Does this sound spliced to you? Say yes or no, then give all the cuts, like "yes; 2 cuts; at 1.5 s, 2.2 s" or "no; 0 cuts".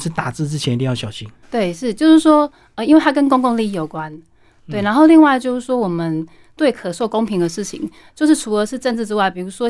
yes; 1 cut; at 1.4 s